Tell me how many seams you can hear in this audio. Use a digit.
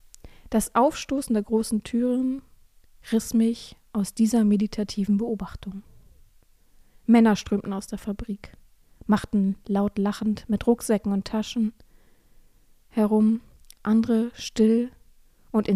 0